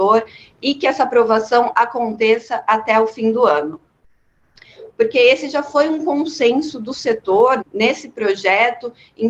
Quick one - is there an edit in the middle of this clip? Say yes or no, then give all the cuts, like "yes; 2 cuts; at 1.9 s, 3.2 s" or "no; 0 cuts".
yes; 2 cuts; at 4.9 s, 7.6 s